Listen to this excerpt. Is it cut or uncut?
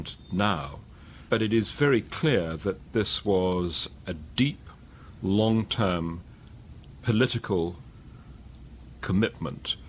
cut